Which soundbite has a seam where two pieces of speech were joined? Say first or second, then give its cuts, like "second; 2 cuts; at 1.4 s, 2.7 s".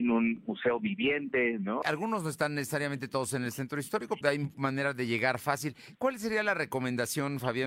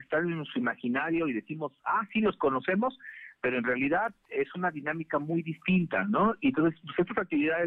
first; 2 cuts; at 1.8 s, 4.2 s